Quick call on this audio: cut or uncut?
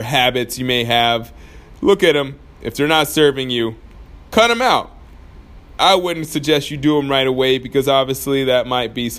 cut